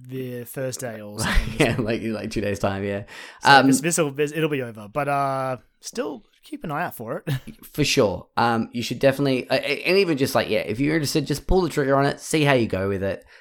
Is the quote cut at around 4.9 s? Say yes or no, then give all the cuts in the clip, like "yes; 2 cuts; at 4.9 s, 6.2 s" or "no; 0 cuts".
no; 0 cuts